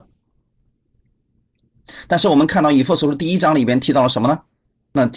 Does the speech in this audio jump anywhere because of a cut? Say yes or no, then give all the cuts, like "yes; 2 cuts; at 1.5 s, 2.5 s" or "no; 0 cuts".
no; 0 cuts